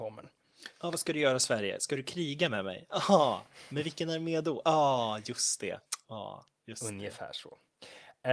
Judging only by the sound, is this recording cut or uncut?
uncut